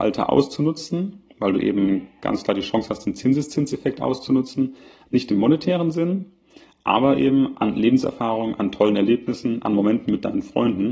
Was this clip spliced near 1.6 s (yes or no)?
no